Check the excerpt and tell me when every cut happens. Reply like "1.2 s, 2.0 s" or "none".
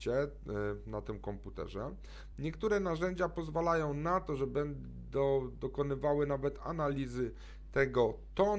none